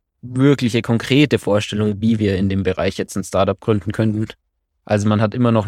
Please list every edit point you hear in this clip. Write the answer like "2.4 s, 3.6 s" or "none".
none